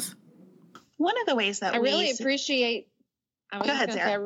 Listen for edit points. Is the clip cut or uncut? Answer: uncut